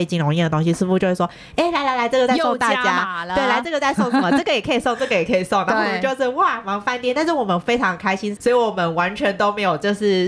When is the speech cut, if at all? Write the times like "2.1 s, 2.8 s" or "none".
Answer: 8.4 s